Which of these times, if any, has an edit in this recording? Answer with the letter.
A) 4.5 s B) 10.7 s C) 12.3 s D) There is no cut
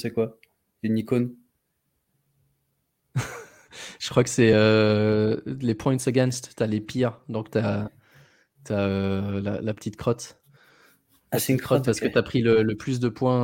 D